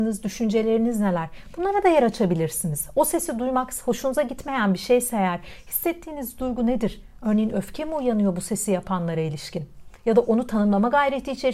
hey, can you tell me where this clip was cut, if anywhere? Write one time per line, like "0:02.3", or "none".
none